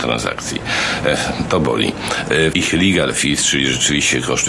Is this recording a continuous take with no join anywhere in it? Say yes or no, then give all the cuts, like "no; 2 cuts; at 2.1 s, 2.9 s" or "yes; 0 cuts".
no; 1 cut; at 2.5 s